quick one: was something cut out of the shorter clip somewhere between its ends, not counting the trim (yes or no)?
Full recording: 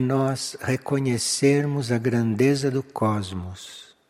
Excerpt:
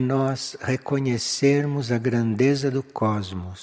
no